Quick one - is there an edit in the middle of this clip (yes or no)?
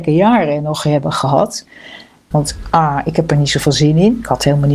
yes